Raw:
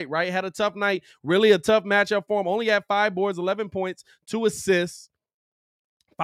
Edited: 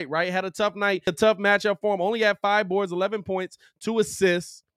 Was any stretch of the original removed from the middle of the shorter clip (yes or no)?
yes